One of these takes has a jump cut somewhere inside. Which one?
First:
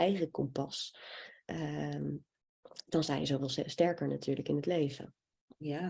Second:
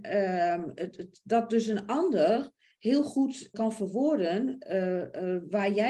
second; 1 cut; at 3.5 s

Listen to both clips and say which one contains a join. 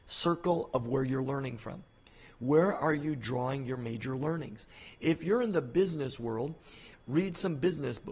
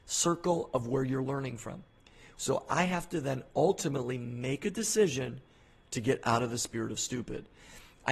second; 1 cut; at 2.3 s

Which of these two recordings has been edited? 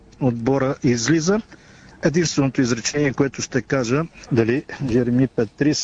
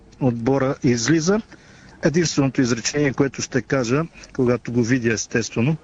first; 1 cut; at 4.3 s

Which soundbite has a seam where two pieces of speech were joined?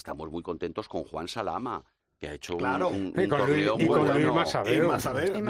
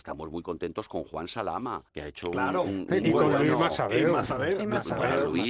second; 2 cuts; at 1.9 s, 3.0 s

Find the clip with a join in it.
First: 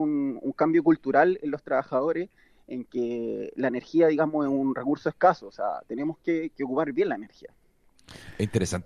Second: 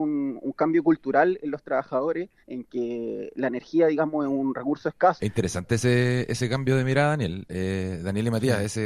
second; 2 cuts; at 2.4 s, 5.2 s

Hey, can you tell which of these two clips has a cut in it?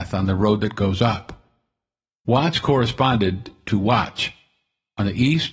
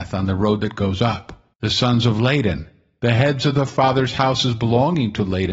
second; 2 cuts; at 1.5 s, 3.0 s

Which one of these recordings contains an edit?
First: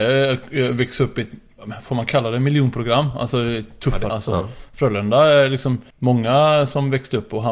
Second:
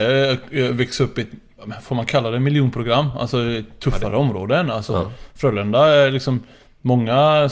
first; 2 cuts; at 4.1 s, 5.9 s

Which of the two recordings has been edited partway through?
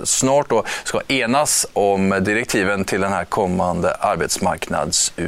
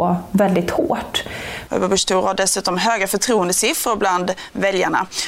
second; 1 cut; at 1.7 s

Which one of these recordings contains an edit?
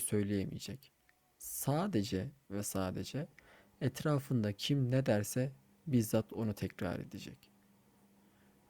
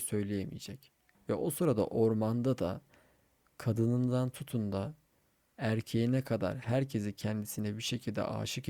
second; 1 cut; at 1.1 s

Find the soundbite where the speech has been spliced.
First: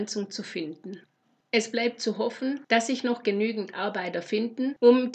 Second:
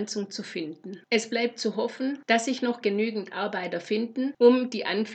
second; 1 cut; at 1.0 s

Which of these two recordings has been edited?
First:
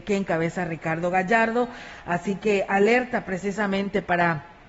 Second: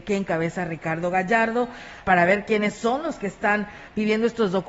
second; 1 cut; at 2.0 s

